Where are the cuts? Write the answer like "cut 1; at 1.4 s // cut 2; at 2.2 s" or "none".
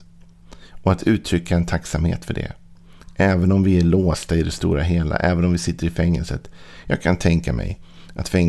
none